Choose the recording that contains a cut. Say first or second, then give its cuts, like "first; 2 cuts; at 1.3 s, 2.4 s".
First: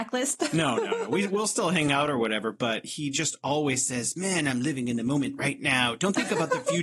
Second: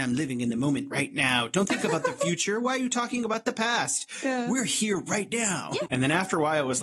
second; 1 cut; at 5.9 s